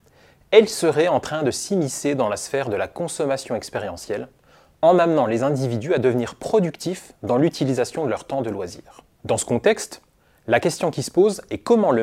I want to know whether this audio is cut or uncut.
uncut